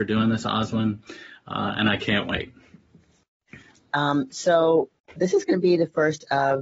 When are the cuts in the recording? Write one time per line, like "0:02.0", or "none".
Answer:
0:03.9
0:05.2